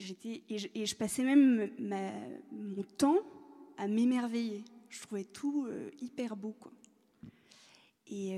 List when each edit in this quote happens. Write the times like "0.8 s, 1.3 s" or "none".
none